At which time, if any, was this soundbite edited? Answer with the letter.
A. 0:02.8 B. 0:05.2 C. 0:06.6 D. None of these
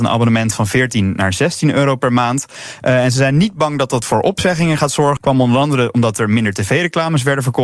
B